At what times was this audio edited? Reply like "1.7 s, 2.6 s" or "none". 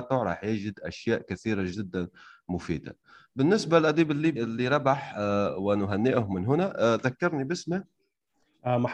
4.4 s